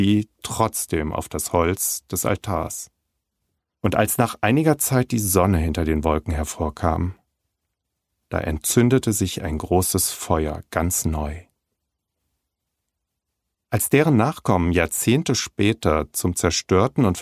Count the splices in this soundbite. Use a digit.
1